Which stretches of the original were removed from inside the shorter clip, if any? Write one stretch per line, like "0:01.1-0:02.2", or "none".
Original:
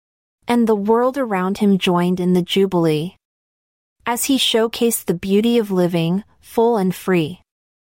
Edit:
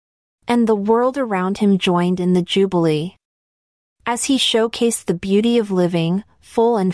none